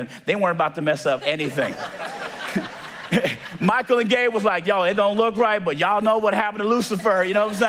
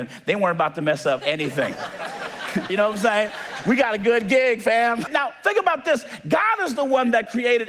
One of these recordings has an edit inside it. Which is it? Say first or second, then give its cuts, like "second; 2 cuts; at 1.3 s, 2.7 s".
second; 2 cuts; at 2.7 s, 5.1 s